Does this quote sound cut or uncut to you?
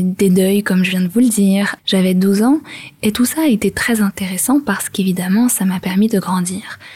cut